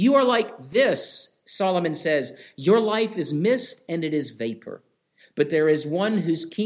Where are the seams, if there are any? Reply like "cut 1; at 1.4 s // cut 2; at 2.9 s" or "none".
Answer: none